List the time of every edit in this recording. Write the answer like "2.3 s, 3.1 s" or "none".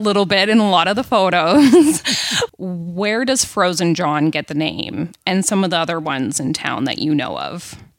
2.5 s

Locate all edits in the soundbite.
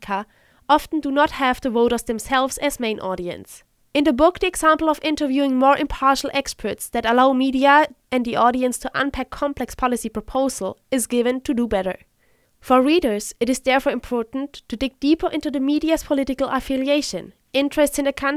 3.8 s, 12.4 s

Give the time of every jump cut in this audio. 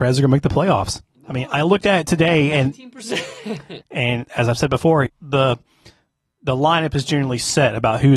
3.8 s, 5.1 s

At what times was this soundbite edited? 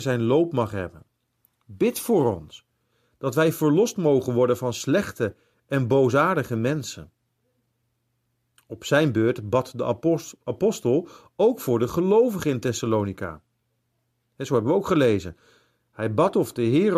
none

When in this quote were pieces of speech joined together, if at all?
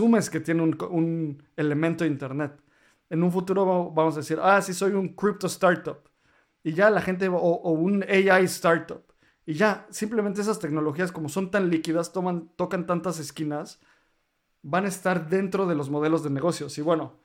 none

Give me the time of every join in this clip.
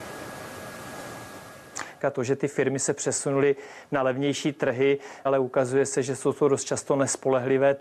2.0 s, 5.3 s

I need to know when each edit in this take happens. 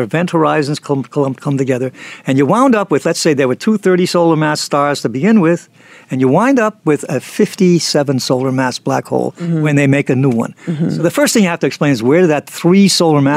none

